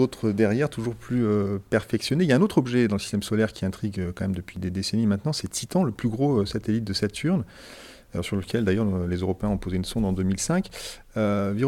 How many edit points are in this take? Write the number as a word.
zero